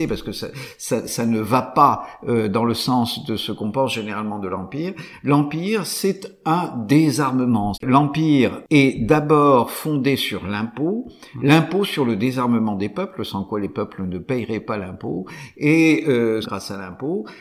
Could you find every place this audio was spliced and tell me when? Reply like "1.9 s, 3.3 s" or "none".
7.7 s, 16.4 s